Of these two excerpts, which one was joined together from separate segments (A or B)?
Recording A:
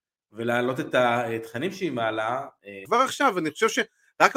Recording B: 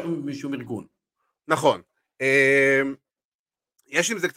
A